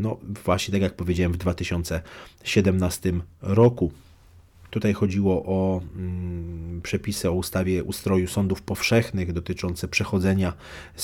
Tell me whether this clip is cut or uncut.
cut